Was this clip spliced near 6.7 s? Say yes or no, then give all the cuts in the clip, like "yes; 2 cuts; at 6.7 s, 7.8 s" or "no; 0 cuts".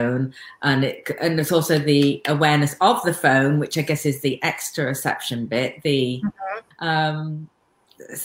yes; 1 cut; at 6.7 s